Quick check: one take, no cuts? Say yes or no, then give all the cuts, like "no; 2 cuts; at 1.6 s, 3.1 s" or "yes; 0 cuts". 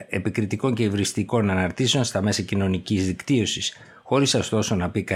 yes; 0 cuts